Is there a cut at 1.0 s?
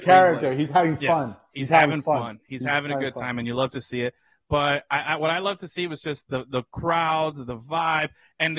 no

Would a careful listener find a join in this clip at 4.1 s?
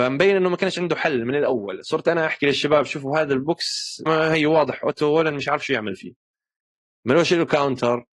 yes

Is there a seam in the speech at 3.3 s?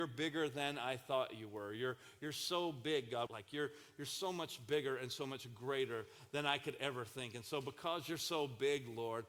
yes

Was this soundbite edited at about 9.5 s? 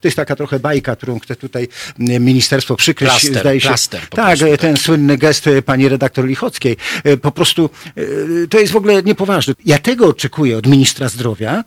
yes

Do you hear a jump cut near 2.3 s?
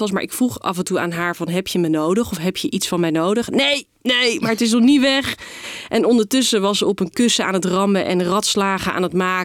no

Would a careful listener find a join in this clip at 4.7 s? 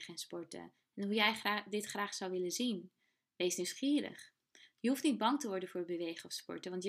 no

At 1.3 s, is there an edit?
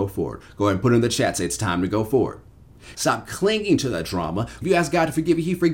no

